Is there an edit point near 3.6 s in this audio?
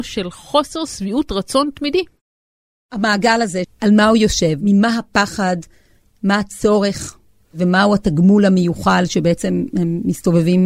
yes; 1 cut; at 3.6 s

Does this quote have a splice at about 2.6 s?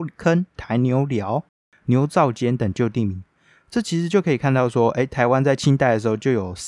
yes; 1 cut; at 2.6 s

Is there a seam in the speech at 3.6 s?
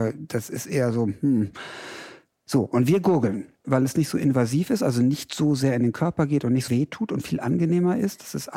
yes; 2 cuts; at 3.6 s, 6.7 s

